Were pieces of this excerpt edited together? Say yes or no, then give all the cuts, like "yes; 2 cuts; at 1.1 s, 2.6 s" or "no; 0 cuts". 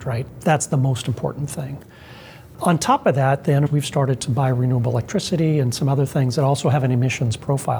yes; 1 cut; at 3.7 s